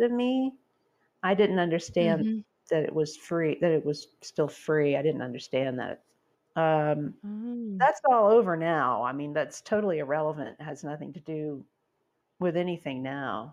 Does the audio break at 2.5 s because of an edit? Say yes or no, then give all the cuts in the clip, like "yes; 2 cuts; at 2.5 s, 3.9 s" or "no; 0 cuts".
no; 1 cut; at 6.3 s